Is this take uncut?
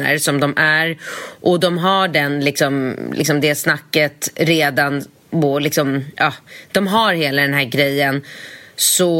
yes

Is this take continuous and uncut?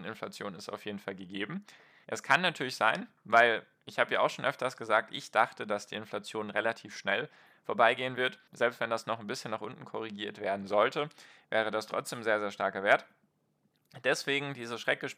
no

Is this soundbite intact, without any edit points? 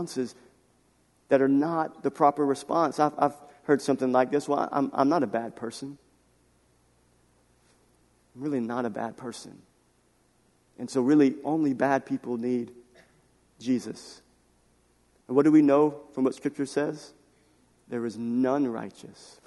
yes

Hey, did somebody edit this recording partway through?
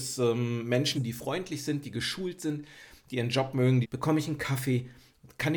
yes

